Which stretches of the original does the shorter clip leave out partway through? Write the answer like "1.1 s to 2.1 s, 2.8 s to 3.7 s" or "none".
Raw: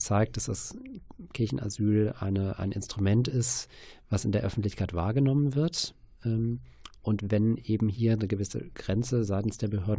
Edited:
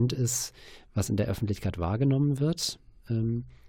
none